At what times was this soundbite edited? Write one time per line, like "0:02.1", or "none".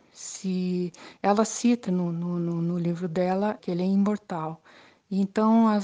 0:01.9
0:03.6